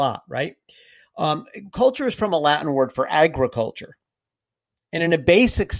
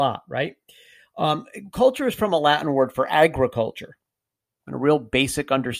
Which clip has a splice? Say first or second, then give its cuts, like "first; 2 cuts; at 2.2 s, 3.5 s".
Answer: second; 1 cut; at 4.6 s